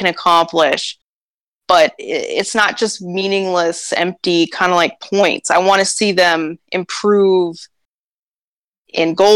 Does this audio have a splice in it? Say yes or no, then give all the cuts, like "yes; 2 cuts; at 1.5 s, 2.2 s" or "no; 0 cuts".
no; 0 cuts